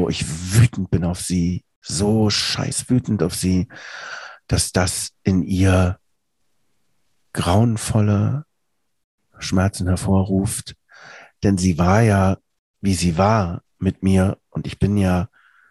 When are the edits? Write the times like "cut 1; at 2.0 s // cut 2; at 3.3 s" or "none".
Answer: none